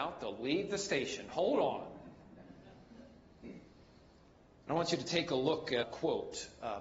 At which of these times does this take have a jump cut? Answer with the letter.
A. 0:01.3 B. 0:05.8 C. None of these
B